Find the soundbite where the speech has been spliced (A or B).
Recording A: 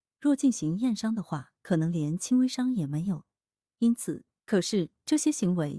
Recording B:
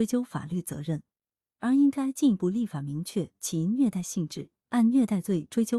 A